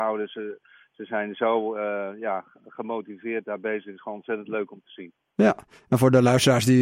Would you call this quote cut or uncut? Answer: uncut